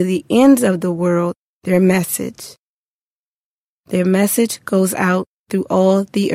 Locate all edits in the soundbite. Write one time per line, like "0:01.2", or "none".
none